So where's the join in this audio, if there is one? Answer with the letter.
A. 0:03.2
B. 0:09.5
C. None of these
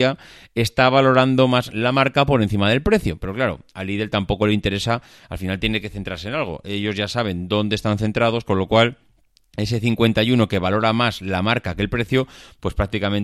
C